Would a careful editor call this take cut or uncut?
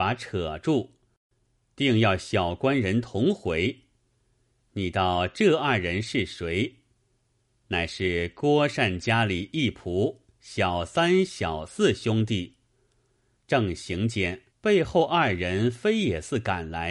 cut